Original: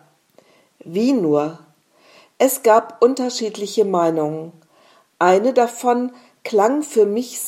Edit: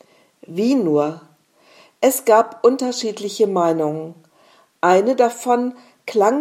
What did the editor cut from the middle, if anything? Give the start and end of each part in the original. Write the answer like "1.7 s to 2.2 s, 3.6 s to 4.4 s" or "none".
none

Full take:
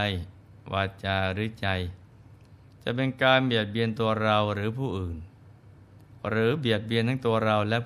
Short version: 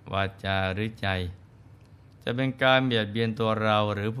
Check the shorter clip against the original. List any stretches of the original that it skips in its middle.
none

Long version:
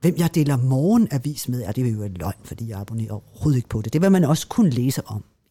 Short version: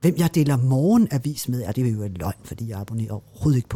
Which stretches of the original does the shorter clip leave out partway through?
none

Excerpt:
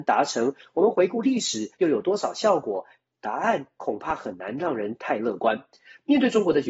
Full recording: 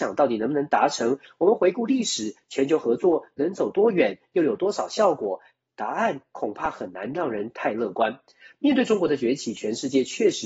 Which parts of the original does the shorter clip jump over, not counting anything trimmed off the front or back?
2.4 s to 4.3 s

